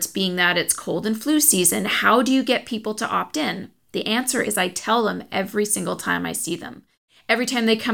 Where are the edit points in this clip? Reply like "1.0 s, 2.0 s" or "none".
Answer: 4.4 s